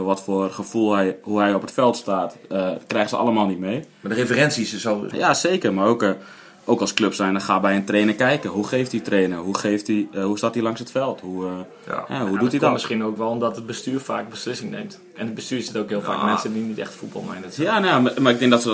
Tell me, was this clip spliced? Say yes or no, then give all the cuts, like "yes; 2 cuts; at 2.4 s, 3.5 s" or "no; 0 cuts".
yes; 1 cut; at 5.1 s